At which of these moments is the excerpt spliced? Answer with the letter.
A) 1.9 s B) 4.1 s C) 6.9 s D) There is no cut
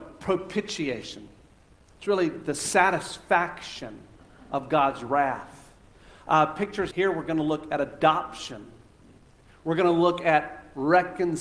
C